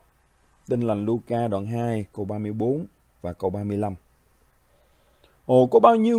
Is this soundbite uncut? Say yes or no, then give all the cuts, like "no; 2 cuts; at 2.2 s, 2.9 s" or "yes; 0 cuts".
yes; 0 cuts